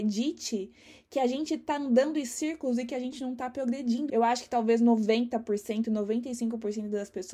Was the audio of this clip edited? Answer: yes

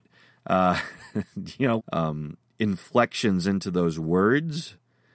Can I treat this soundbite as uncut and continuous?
no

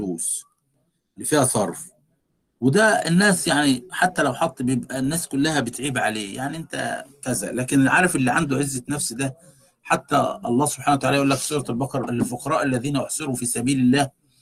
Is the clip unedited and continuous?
no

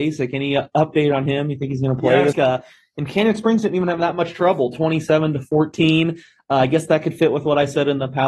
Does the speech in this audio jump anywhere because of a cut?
yes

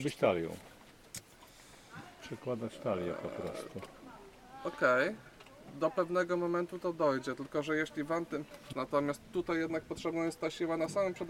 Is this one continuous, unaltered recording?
no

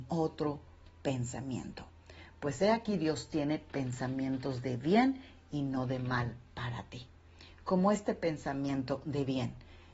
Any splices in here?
no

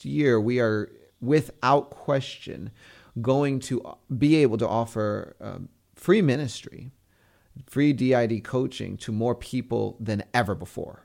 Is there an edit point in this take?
no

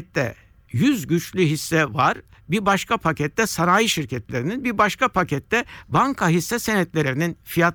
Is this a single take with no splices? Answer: yes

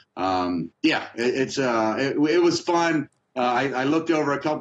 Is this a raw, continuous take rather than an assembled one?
yes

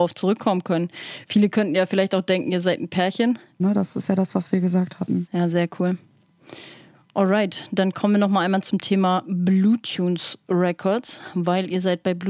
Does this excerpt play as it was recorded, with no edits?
no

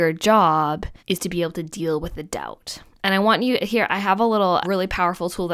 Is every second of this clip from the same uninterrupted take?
no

